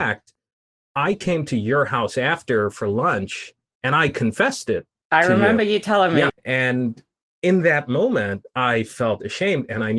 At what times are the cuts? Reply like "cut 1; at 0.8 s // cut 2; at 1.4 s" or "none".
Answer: cut 1; at 6.3 s